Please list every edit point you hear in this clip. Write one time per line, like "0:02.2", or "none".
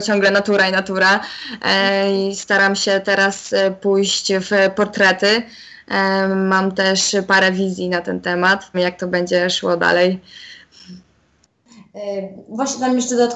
0:08.7